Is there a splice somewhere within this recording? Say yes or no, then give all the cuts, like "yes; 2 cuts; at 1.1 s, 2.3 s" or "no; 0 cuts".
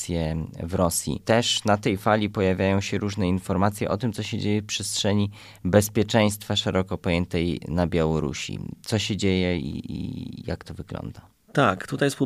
no; 0 cuts